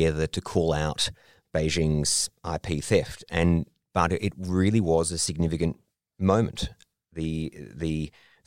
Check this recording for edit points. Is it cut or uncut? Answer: uncut